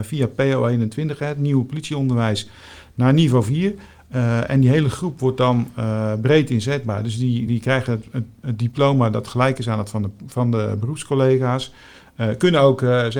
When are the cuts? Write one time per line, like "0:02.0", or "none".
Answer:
none